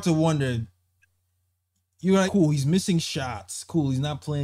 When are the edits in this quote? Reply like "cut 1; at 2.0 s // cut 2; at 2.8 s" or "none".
cut 1; at 2.3 s

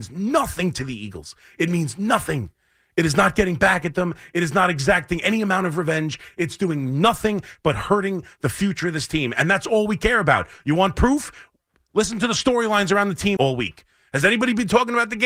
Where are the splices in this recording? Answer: cut 1; at 13.4 s

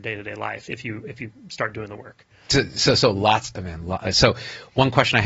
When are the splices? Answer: none

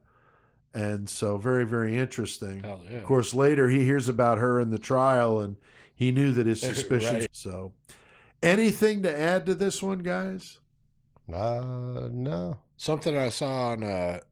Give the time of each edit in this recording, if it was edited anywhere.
cut 1; at 7.3 s

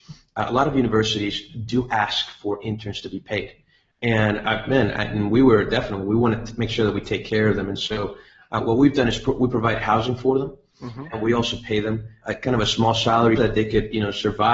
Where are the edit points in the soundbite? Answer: cut 1; at 12.2 s // cut 2; at 13.4 s

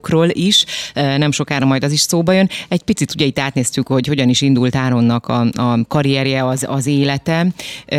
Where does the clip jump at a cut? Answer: none

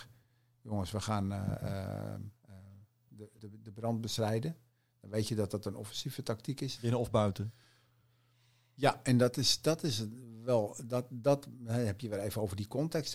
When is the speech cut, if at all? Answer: cut 1; at 3.4 s // cut 2; at 6.8 s

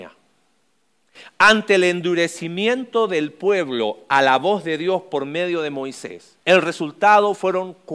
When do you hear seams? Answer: cut 1; at 6.4 s

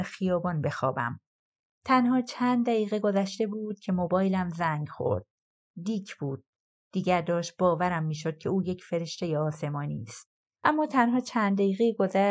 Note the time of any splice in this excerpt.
cut 1; at 10.6 s

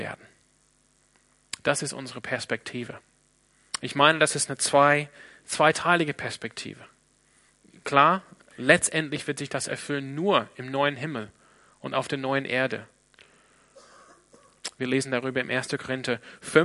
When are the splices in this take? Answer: cut 1; at 8.5 s

